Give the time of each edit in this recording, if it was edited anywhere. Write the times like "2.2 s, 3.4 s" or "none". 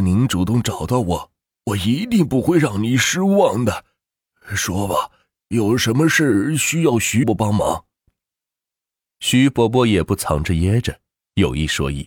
7.2 s